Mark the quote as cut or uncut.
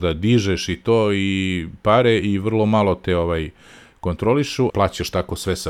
cut